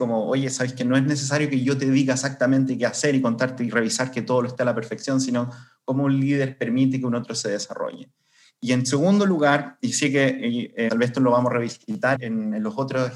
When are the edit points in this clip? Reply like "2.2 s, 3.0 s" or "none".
10.9 s, 12.1 s